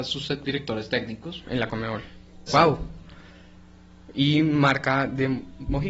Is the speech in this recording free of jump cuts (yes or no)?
no